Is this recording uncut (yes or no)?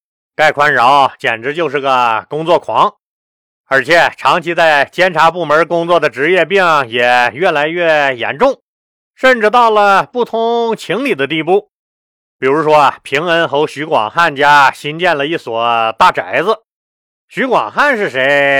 yes